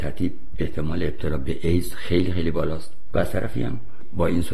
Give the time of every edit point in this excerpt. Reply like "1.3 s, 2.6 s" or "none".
none

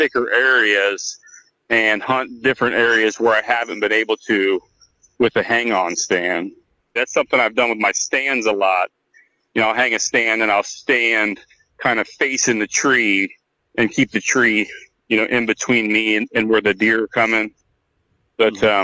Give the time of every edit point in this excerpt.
7.0 s

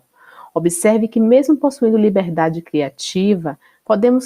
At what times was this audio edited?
none

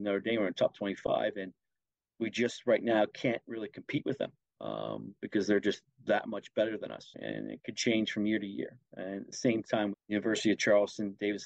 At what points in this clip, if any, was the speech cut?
7.1 s, 9.9 s

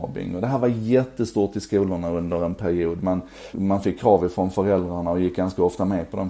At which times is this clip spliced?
3.5 s

